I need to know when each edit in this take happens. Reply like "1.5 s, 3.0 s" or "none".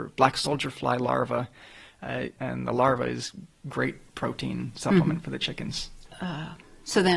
2.4 s